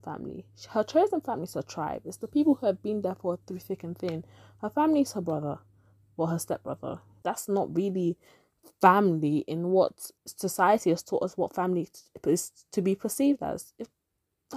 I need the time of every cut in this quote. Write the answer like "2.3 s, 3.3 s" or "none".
7.2 s, 10.2 s